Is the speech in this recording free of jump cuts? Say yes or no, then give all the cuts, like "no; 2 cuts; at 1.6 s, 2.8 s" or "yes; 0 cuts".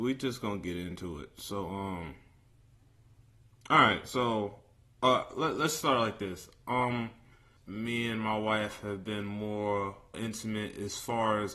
no; 2 cuts; at 7.6 s, 10.1 s